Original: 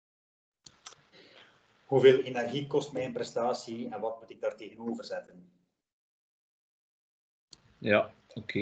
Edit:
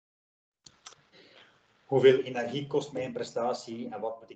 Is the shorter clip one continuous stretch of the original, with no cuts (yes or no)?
yes